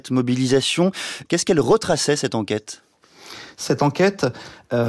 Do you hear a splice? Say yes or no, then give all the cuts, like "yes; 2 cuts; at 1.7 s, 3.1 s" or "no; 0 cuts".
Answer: yes; 1 cut; at 1.3 s